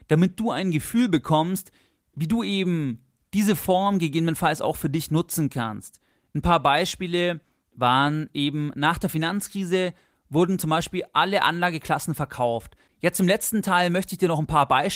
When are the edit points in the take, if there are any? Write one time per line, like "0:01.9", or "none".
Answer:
0:12.9